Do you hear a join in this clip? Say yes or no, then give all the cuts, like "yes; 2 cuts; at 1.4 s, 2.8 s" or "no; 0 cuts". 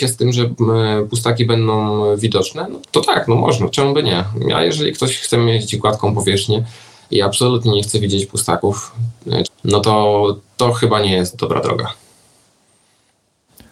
yes; 2 cuts; at 2.8 s, 9.4 s